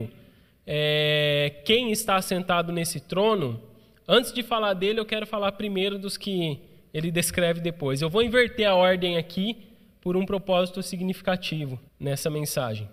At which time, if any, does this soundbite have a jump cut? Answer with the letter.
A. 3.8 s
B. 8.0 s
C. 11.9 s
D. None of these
C